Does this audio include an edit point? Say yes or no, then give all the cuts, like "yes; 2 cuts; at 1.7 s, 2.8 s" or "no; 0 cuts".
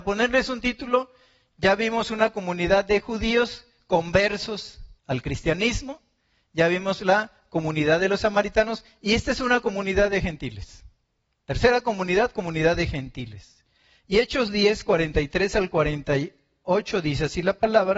yes; 1 cut; at 5.0 s